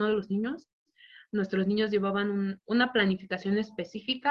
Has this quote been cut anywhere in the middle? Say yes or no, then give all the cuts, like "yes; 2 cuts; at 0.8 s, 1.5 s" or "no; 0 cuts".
yes; 1 cut; at 2.6 s